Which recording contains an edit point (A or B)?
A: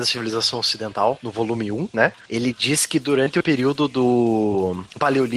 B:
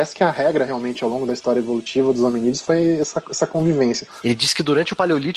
B